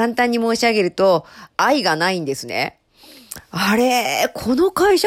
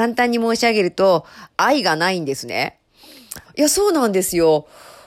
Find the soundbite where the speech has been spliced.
second; 1 cut; at 3.4 s

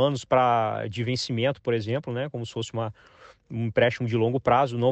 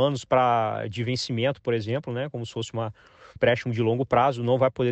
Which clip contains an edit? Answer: second; 1 cut; at 3.4 s

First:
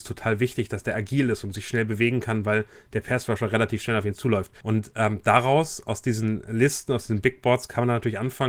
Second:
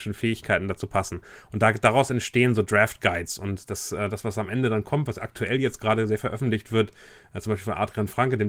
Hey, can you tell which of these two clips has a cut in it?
first; 1 cut; at 4.6 s

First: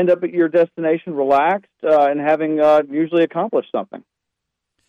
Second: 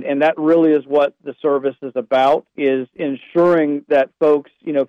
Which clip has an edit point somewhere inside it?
second; 1 cut; at 2.6 s

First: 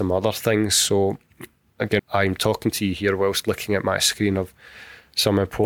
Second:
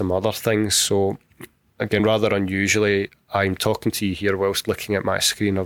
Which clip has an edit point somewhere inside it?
first; 1 cut; at 2.0 s

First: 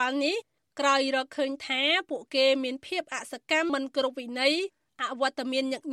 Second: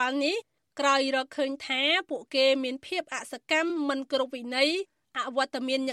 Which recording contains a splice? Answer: first; 1 cut; at 3.7 s

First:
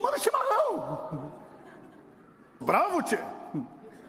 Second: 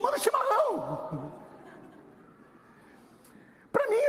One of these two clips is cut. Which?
first; 1 cut; at 2.6 s

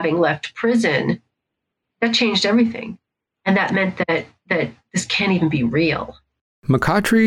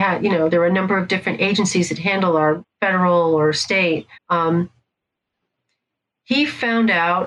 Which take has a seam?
second; 2 cuts; at 2.6 s, 4.2 s

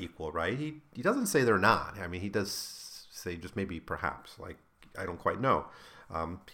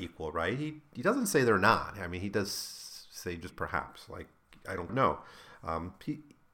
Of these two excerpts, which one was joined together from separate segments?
second; 2 cuts; at 3.5 s, 4.9 s

